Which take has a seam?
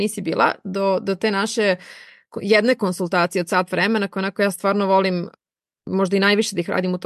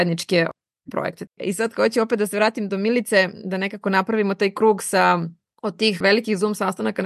second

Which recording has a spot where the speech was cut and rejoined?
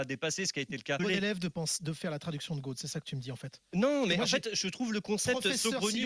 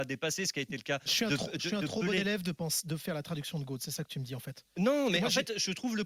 first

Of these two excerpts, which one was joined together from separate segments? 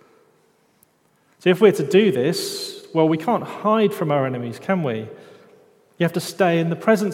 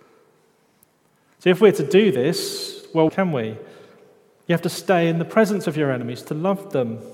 second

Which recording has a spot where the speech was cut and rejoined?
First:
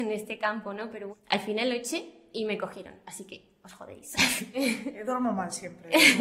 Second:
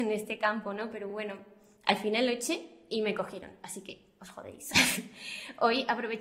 first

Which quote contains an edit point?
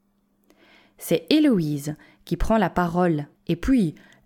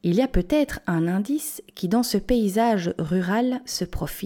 first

